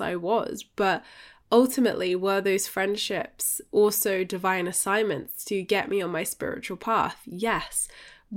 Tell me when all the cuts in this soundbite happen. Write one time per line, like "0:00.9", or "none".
none